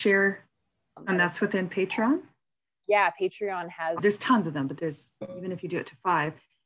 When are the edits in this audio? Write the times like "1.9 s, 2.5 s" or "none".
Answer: 1.0 s, 4.0 s